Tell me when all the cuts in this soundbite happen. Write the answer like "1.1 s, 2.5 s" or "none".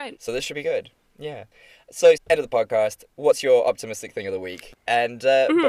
2.2 s, 4.7 s